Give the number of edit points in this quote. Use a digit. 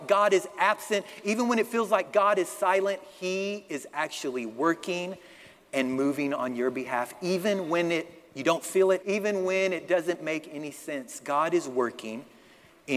1